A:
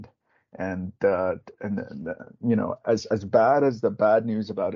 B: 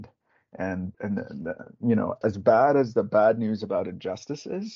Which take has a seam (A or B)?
B